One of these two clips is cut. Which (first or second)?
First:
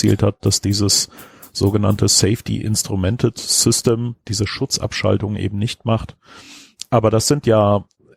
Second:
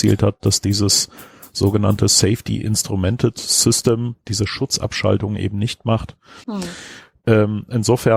second